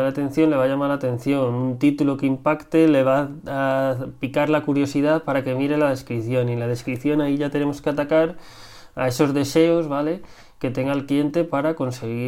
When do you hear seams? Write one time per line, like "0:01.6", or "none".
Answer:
none